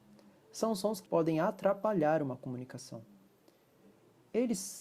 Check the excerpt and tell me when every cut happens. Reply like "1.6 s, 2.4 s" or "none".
1.1 s